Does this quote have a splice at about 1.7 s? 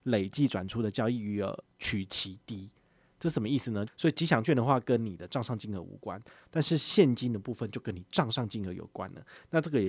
no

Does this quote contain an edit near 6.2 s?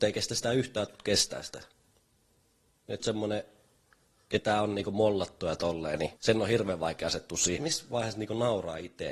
yes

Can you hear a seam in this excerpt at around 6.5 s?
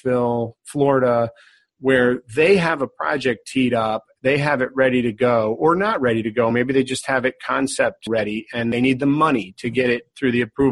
no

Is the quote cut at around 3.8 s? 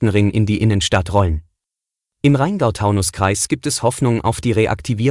no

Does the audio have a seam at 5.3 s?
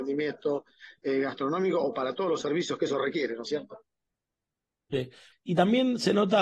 yes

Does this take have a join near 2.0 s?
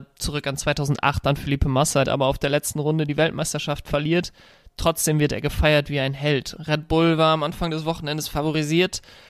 yes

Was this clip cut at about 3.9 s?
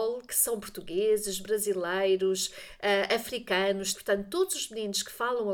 yes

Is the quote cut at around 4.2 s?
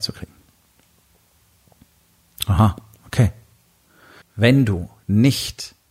yes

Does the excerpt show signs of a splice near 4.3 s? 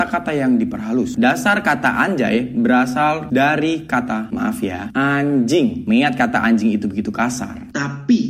no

